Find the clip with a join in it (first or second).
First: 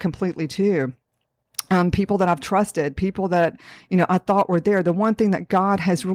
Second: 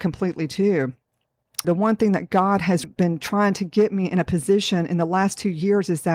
second